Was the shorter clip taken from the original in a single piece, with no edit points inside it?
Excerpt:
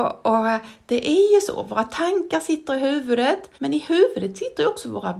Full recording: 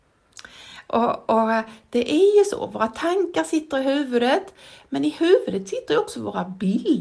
no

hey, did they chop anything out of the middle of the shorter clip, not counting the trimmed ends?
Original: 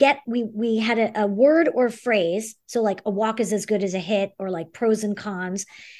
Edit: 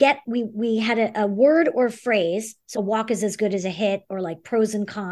yes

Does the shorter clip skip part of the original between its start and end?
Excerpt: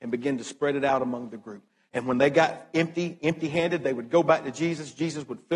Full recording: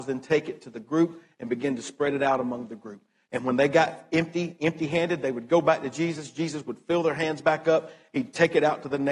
no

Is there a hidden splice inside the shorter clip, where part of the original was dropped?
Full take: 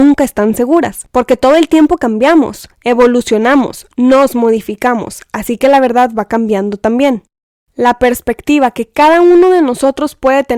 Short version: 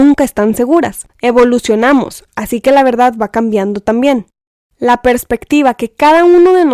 yes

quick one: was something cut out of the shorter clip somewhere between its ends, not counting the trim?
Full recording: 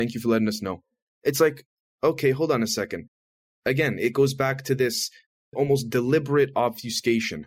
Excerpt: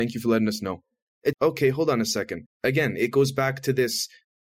yes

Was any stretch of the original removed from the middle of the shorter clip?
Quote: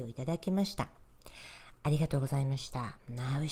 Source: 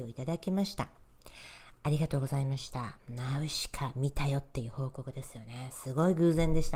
no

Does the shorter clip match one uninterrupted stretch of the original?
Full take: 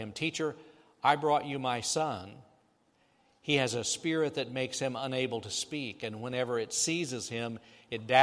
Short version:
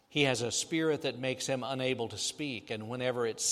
yes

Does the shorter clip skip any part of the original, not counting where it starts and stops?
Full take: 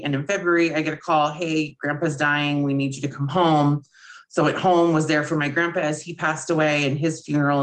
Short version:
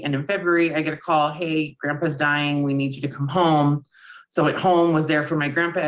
no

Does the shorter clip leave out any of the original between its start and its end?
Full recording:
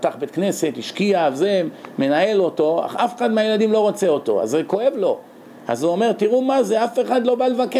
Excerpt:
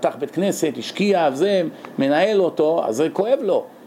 yes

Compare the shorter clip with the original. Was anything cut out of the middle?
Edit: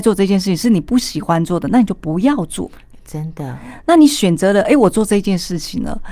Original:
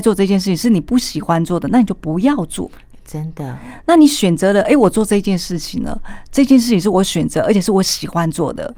no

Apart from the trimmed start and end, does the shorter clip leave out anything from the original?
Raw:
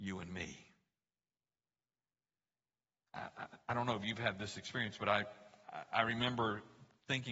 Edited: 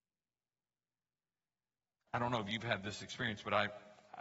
yes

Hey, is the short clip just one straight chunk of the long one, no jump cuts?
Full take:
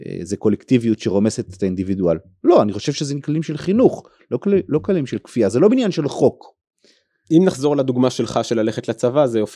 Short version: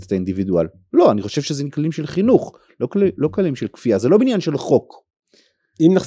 yes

